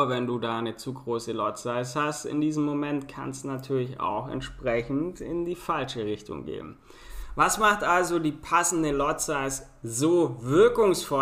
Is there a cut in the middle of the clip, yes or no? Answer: no